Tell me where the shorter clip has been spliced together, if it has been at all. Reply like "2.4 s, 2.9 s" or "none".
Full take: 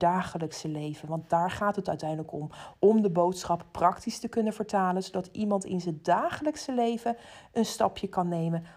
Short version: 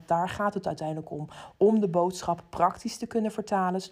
none